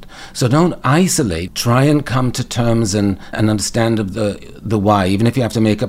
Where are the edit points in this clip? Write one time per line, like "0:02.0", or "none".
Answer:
0:01.5
0:03.3